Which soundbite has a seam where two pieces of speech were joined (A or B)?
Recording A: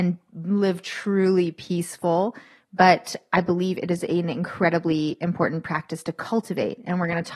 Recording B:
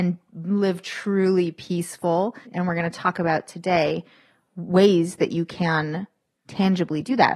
B